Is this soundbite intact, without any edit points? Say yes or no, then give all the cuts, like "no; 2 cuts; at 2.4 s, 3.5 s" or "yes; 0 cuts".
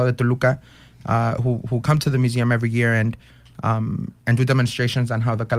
yes; 0 cuts